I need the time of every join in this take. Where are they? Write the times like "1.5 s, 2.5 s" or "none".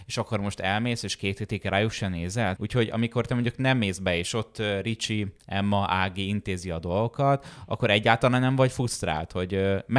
2.6 s